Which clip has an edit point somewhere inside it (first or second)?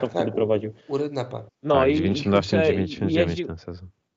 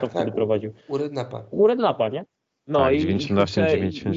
first